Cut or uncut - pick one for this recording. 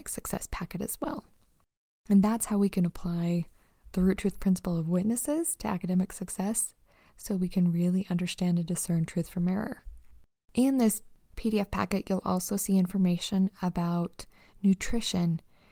uncut